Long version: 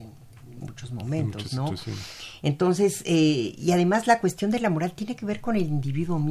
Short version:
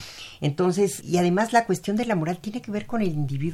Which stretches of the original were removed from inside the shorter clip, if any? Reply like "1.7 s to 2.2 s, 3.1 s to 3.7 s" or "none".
3.0 s to 3.6 s